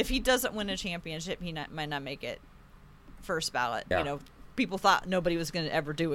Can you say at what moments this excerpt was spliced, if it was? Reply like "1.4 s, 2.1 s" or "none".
3.9 s